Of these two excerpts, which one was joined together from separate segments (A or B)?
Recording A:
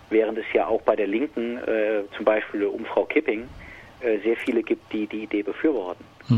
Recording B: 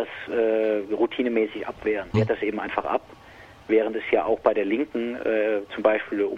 B